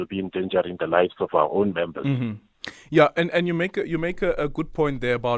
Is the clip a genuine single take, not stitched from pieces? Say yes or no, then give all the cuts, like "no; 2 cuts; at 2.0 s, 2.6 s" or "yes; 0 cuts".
yes; 0 cuts